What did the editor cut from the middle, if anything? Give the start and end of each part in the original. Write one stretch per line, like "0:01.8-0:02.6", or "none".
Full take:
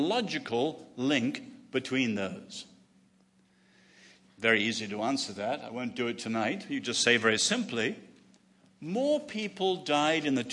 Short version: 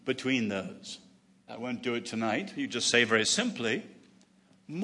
0:03.1-0:05.6